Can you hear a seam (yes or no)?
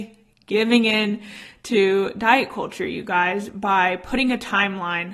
no